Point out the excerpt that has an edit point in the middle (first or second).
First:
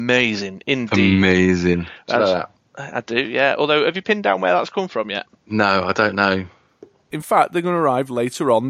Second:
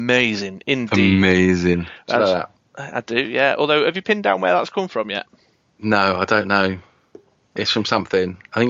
first